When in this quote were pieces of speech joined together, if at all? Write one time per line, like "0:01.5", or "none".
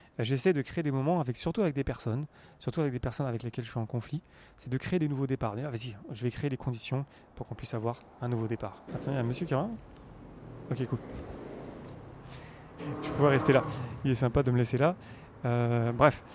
0:08.9
0:12.8